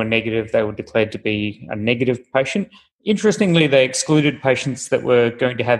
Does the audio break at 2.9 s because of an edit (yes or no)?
yes